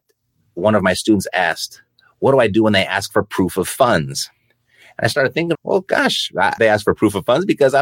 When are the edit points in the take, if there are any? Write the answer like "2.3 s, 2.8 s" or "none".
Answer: 5.5 s, 6.6 s